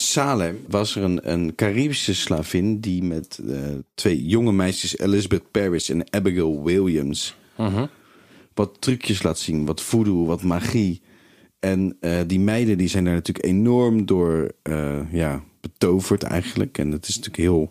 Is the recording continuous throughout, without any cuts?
yes; 0 cuts

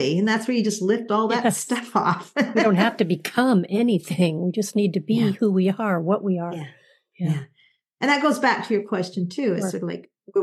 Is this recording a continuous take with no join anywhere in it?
yes; 0 cuts

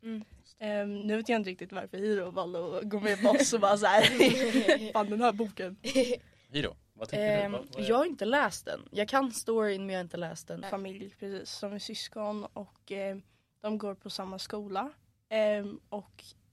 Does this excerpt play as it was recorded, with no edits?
no; 1 cut; at 10.6 s

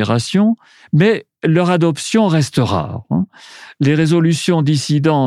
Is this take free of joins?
yes; 0 cuts

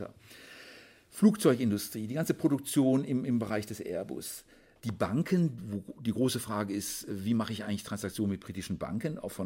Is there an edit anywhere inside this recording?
no; 0 cuts

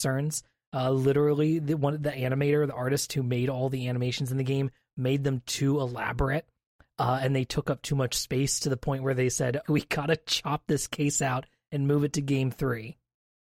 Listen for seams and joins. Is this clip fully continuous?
no; 1 cut; at 9.6 s

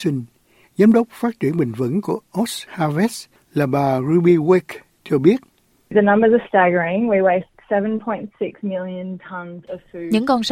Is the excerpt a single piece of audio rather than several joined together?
no; 1 cut; at 3.4 s

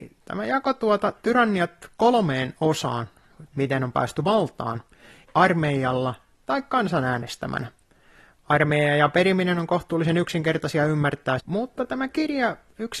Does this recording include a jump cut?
yes; 3 cuts; at 3.5 s, 5.2 s, 11.4 s

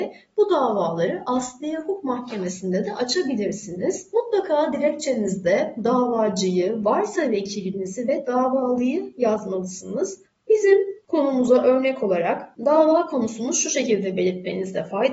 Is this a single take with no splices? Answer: yes; 0 cuts

